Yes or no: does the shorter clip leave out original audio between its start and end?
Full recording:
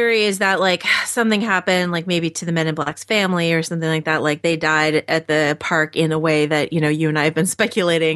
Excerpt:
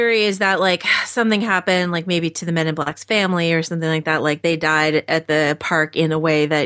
no